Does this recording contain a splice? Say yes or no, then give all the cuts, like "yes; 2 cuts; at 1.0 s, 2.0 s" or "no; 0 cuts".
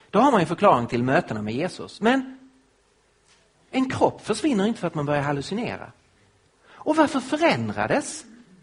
yes; 1 cut; at 6.5 s